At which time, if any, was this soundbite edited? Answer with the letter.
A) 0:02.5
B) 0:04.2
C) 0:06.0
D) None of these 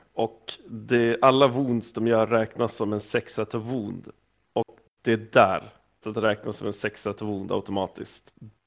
C